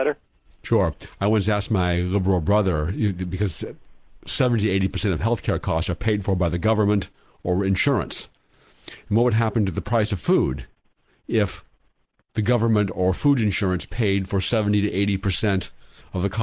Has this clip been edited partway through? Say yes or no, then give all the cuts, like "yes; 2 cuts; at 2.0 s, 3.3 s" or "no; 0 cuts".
no; 0 cuts